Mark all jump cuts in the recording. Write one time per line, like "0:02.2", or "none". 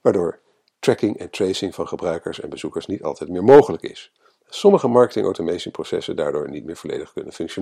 none